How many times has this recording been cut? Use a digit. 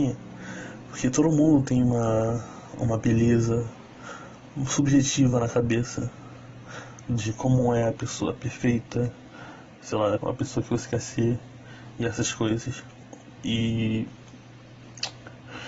2